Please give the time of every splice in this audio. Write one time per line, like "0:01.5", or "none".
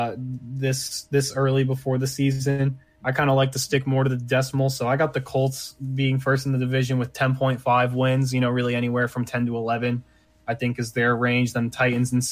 none